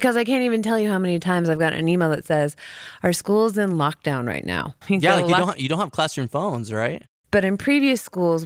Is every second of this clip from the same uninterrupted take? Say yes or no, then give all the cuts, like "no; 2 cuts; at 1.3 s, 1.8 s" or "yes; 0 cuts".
no; 2 cuts; at 4.8 s, 7.2 s